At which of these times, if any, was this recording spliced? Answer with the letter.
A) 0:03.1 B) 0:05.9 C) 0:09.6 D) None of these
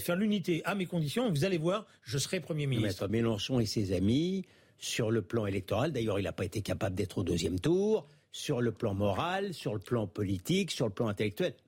A